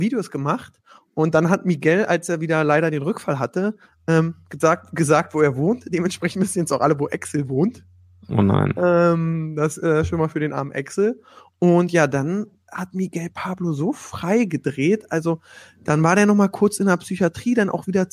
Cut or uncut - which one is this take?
uncut